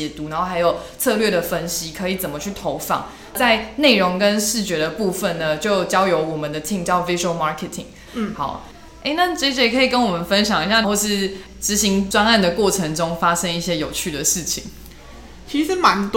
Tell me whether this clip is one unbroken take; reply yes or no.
no